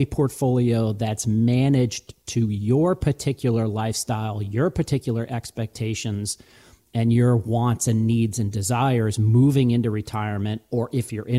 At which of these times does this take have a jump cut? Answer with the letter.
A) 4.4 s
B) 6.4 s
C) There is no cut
C